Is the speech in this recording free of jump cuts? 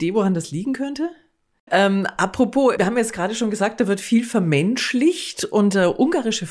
no; 2 cuts; at 1.7 s, 2.8 s

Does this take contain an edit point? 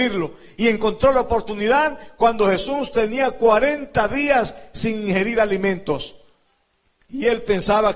yes; 1 cut; at 7.1 s

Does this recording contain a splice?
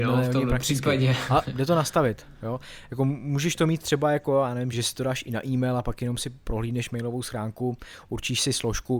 yes; 1 cut; at 4.7 s

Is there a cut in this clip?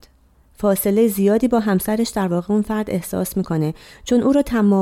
no; 0 cuts

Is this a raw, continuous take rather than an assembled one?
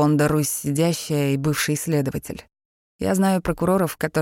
no; 1 cut; at 2.8 s

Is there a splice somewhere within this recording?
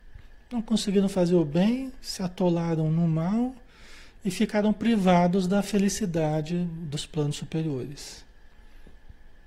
no; 0 cuts

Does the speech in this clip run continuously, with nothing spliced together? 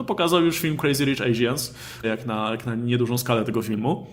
no; 1 cut; at 2.0 s

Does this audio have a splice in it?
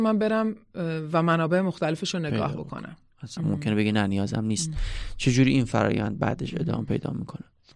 yes; 1 cut; at 3.4 s

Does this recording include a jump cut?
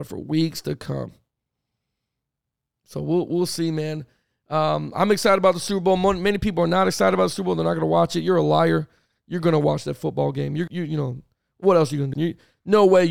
yes; 2 cuts; at 10.7 s, 12.1 s

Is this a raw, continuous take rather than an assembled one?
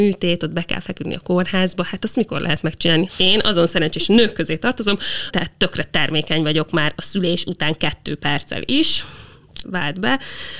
no; 3 cuts; at 3.1 s, 5.3 s, 9.6 s

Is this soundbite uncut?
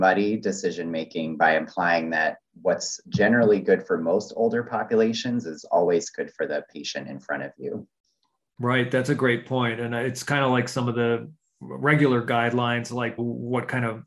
no; 1 cut; at 13.2 s

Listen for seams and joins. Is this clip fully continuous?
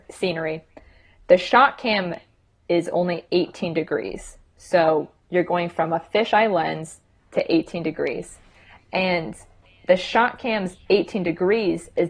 yes; 0 cuts

